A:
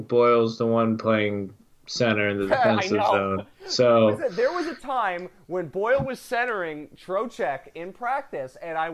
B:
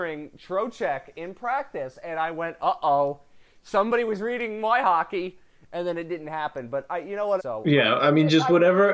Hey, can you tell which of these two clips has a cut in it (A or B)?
B